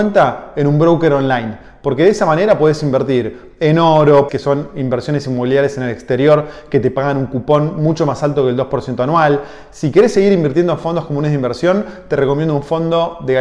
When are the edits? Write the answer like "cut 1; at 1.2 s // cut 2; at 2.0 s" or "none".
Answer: cut 1; at 4.3 s